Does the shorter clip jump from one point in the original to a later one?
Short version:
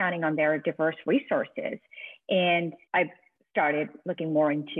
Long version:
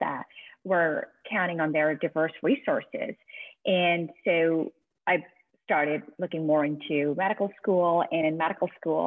yes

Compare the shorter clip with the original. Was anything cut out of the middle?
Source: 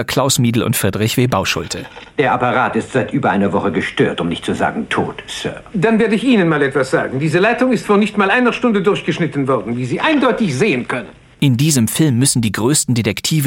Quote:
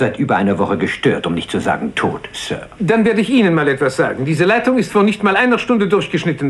no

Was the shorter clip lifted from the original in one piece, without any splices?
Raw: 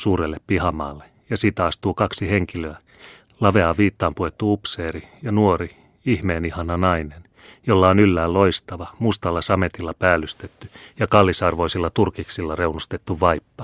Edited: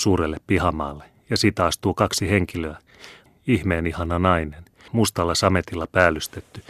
no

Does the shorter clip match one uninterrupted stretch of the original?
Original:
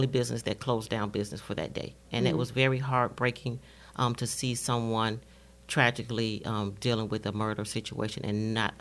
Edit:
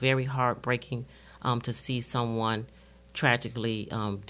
yes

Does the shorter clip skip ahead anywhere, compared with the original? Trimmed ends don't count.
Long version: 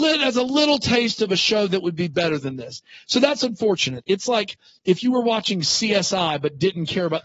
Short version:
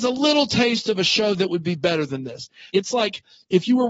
yes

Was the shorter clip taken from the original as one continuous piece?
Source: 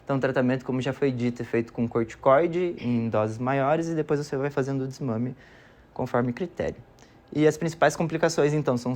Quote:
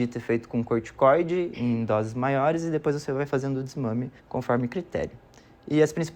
no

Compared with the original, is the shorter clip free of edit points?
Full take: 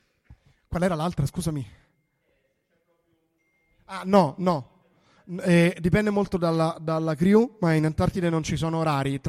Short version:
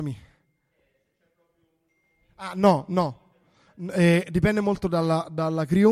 yes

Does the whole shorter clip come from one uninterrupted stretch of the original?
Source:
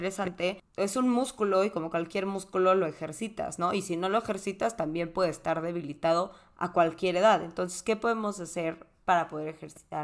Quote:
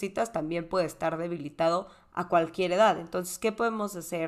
yes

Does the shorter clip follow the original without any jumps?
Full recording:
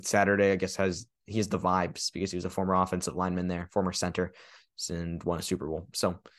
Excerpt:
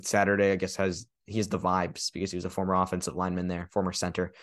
yes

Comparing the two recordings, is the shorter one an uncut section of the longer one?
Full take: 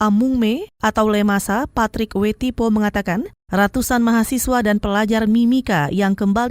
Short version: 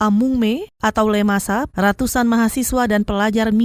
no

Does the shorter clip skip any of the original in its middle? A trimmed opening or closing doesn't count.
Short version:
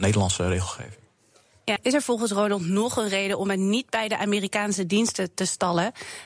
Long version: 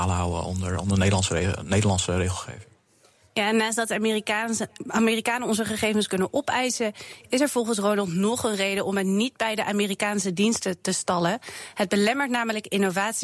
yes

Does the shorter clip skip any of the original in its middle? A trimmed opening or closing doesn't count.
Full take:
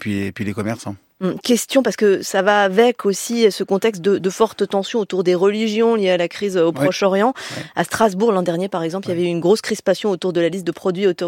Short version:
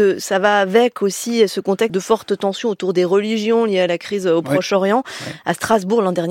yes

